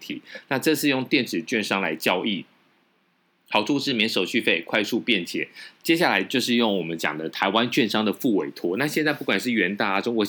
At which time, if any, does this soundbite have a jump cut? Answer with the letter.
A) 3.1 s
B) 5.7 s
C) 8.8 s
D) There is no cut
D